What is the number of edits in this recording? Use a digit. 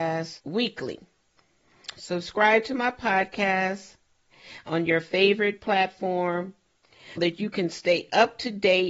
2